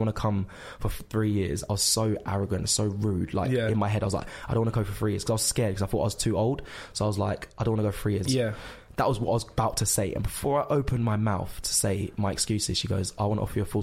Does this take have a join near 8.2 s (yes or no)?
yes